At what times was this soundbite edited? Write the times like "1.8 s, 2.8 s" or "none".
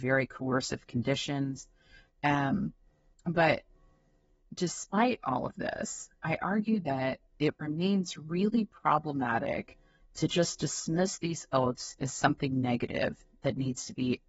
none